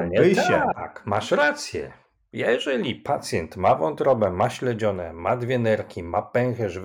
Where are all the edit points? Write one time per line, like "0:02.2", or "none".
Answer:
none